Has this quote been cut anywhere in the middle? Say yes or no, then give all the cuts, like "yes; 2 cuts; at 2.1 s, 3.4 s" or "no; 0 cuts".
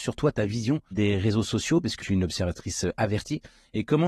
yes; 2 cuts; at 0.9 s, 2.0 s